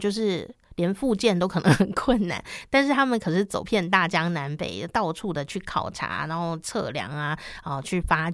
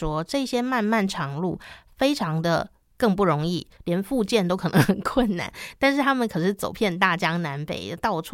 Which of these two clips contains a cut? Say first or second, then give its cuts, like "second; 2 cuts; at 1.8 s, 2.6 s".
second; 1 cut; at 3.8 s